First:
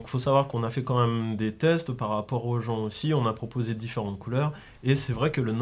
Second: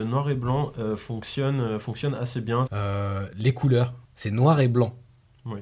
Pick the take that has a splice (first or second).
second